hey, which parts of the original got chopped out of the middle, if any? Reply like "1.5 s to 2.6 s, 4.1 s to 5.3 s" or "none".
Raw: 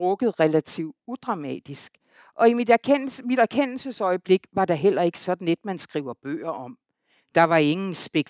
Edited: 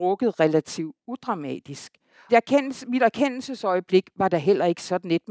2.3 s to 2.7 s